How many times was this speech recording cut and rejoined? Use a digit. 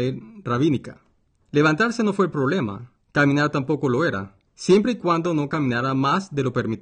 3